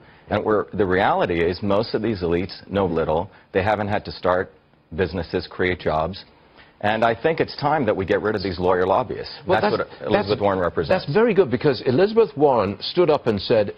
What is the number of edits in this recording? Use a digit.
1